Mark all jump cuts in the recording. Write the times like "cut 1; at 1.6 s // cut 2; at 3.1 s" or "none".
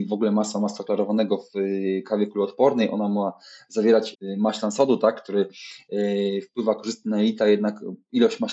cut 1; at 4.1 s